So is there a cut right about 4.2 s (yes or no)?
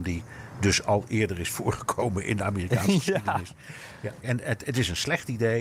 yes